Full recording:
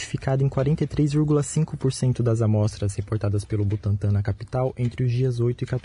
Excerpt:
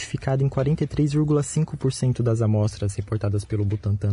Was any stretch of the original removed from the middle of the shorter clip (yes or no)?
no